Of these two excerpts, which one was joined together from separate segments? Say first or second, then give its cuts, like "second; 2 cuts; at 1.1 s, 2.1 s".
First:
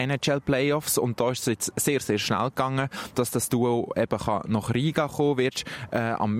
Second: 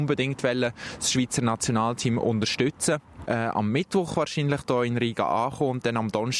second; 1 cut; at 3.2 s